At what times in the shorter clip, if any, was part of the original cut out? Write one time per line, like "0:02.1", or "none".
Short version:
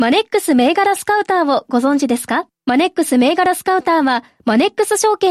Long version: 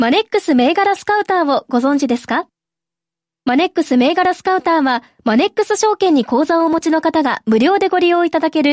0:02.6